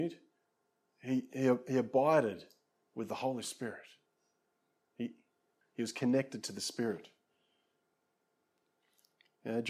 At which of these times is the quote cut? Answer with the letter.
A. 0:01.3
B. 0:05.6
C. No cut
B